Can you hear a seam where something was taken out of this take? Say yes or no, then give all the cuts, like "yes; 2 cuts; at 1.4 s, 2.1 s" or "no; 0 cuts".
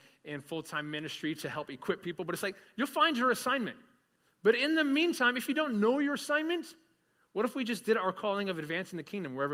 no; 0 cuts